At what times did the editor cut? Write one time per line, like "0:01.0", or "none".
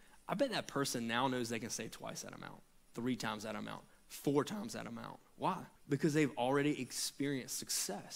0:05.8